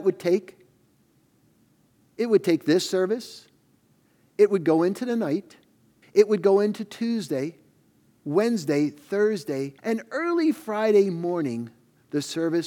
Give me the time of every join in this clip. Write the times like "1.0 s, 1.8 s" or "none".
6.0 s, 9.8 s